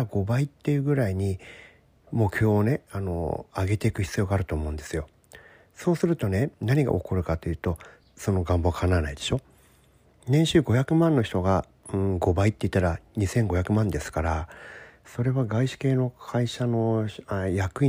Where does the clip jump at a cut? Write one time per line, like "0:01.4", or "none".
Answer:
0:08.0